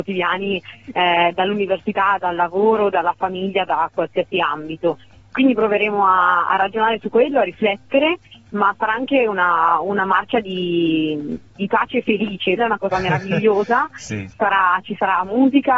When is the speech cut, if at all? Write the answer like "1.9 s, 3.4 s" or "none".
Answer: 12.6 s, 14.3 s